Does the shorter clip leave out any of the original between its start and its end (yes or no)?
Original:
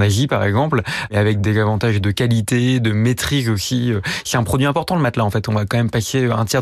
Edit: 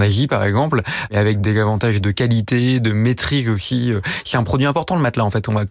no